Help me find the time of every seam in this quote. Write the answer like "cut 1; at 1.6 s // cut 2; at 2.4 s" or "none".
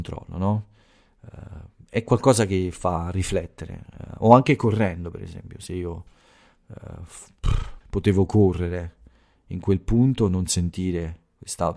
cut 1; at 7.8 s